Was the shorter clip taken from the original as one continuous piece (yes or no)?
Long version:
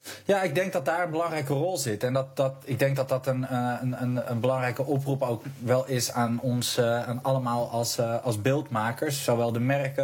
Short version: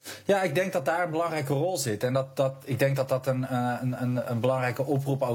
yes